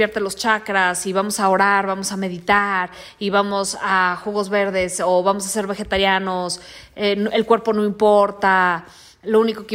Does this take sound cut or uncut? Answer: uncut